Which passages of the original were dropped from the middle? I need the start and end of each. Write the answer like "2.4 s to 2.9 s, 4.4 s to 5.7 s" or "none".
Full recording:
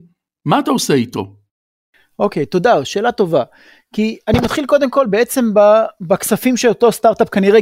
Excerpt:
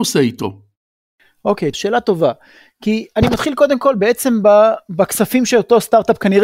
2.5 s to 2.8 s